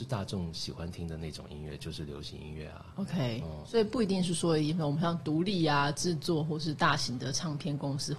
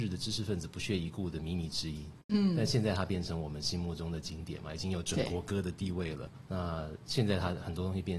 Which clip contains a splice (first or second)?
second